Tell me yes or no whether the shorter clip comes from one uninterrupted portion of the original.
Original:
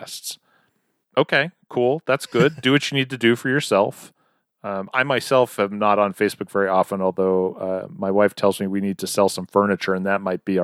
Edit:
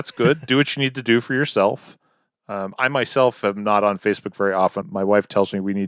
no